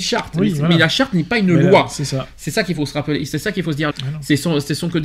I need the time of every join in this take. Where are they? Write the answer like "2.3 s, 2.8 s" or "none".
3.9 s